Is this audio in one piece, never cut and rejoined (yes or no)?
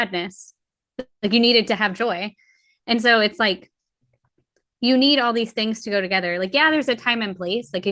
yes